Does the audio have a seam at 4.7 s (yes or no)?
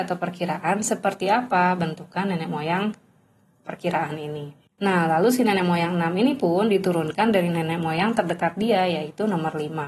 yes